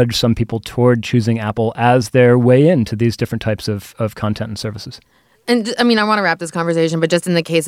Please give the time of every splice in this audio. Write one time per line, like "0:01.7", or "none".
none